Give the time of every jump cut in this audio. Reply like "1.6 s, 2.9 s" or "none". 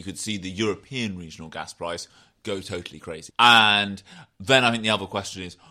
3.3 s